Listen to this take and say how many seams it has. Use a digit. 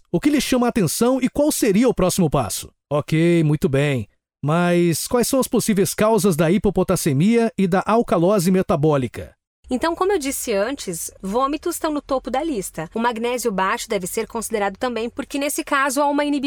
1